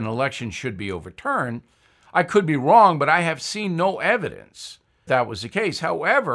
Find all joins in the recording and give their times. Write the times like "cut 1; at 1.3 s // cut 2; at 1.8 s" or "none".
cut 1; at 5.1 s